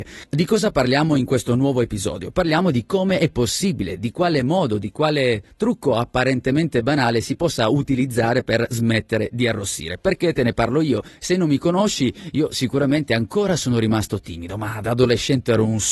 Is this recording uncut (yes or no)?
yes